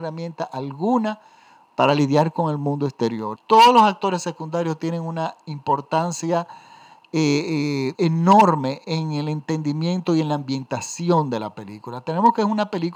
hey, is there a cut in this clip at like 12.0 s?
no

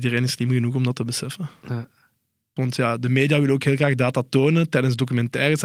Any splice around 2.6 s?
yes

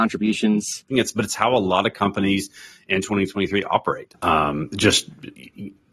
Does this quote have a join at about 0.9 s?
yes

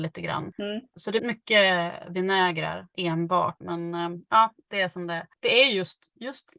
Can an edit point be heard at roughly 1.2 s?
yes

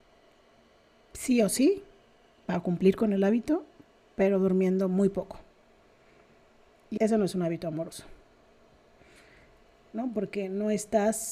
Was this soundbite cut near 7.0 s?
yes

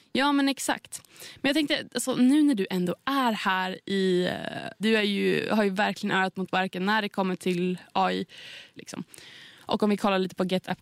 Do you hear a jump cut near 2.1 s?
no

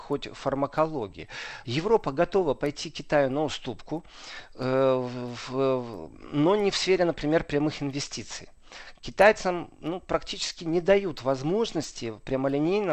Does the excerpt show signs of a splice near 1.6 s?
yes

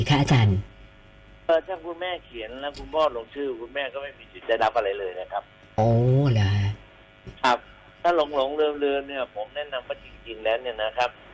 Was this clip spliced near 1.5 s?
yes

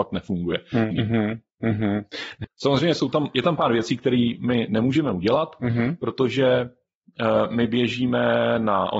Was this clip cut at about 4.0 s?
no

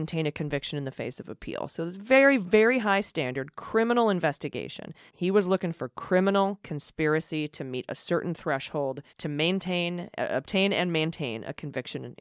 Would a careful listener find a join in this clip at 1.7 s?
no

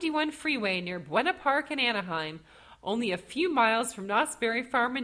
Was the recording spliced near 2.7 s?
no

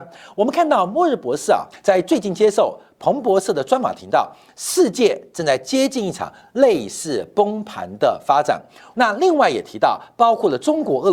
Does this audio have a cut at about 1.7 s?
yes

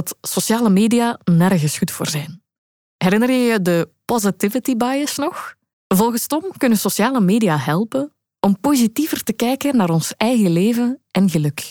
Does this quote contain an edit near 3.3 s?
no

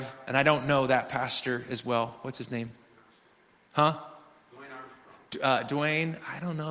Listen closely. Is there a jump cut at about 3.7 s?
no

